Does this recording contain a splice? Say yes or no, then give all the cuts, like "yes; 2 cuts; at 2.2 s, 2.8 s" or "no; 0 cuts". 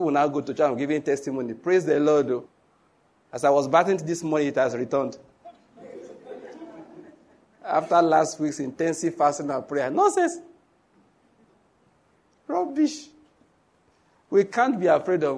no; 0 cuts